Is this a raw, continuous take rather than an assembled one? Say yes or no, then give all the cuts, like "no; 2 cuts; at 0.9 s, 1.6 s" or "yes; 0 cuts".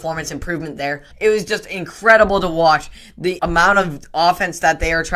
no; 2 cuts; at 1.1 s, 3.4 s